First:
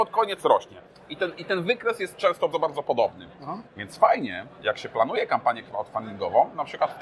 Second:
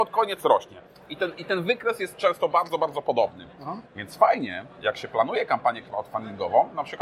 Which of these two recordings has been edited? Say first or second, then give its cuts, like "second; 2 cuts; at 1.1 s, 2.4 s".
first; 1 cut; at 2.5 s